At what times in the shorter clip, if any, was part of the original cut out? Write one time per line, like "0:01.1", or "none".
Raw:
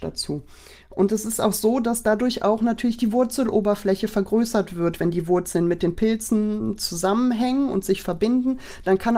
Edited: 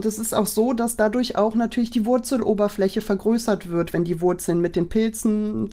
none